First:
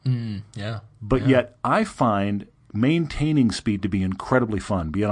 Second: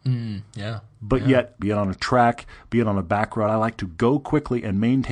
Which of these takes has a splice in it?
second; 1 cut; at 1.6 s

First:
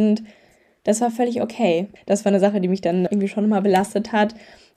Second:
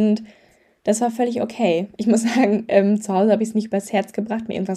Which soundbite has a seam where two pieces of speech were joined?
first; 2 cuts; at 2.0 s, 3.1 s

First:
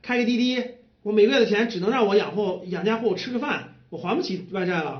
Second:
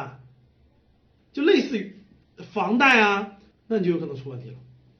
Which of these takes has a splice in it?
second; 2 cuts; at 1.2 s, 3.5 s

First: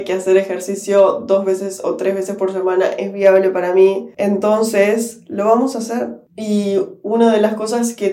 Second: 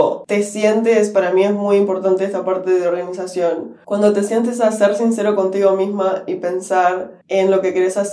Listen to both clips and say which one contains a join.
second; 1 cut; at 7.2 s

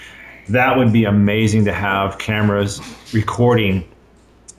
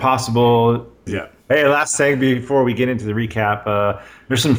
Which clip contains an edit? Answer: second; 1 cut; at 1.1 s

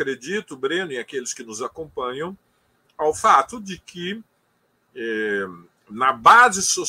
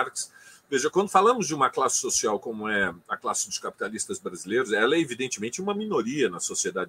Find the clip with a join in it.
second; 1 cut; at 0.9 s

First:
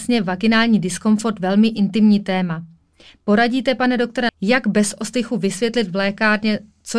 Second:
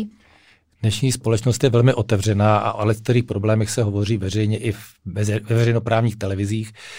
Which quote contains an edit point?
first; 1 cut; at 4.3 s

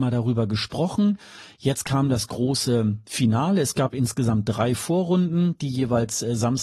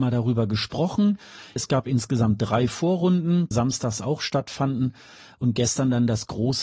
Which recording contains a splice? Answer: second; 2 cuts; at 1.6 s, 3.5 s

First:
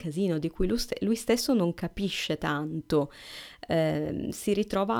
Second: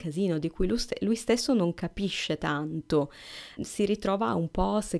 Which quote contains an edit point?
second; 1 cut; at 3.6 s

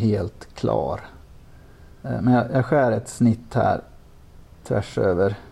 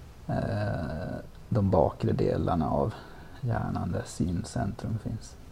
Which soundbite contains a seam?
first; 2 cuts; at 2.0 s, 4.6 s

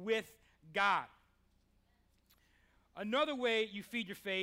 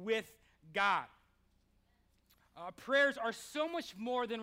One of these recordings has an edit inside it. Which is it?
second; 1 cut; at 2.4 s

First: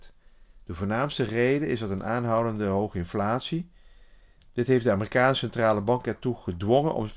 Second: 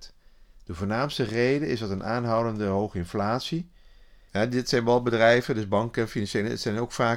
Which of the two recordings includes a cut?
second; 1 cut; at 4.3 s

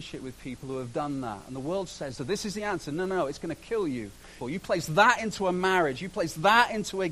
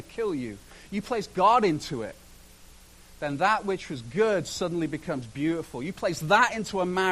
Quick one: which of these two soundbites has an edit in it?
first; 2 cuts; at 2.2 s, 4.4 s

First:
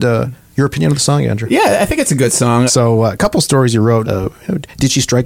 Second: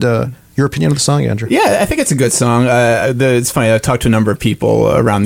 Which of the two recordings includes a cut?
first; 2 cuts; at 2.7 s, 4.0 s

